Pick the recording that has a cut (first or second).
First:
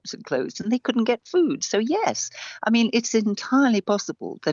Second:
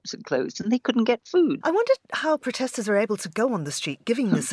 second